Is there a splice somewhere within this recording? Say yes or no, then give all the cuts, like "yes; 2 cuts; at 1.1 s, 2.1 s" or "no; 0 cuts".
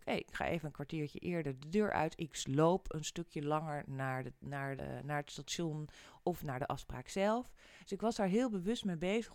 yes; 1 cut; at 4.8 s